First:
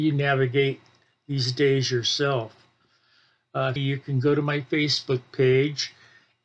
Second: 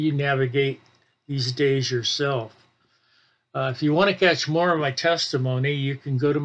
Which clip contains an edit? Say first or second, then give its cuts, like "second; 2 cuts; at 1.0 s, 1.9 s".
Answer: first; 1 cut; at 3.8 s